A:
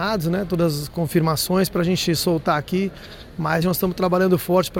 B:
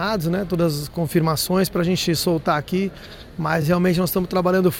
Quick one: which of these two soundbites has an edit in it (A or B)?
A